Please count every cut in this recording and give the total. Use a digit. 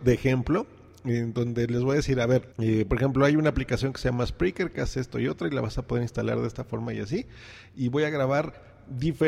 1